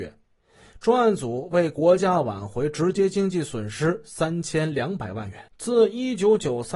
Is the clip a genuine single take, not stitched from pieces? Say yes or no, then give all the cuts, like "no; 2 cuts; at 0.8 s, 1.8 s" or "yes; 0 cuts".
no; 1 cut; at 5.5 s